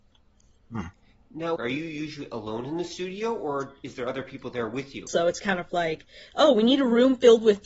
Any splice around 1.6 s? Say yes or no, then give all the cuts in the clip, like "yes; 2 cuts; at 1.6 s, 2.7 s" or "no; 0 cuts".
yes; 2 cuts; at 1.6 s, 5.1 s